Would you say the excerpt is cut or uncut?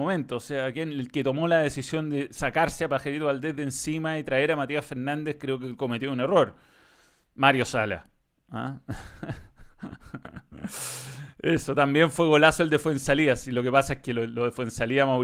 uncut